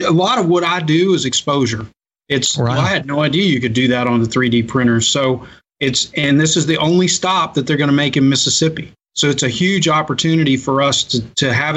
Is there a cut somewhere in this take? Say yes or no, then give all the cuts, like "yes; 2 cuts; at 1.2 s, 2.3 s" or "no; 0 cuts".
yes; 1 cut; at 2.7 s